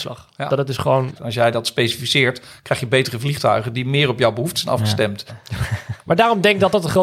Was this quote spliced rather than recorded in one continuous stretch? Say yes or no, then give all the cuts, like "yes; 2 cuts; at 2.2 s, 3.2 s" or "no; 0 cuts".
yes; 2 cuts; at 1.1 s, 5.3 s